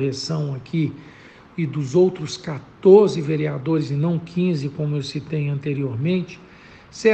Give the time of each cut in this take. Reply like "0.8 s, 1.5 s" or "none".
none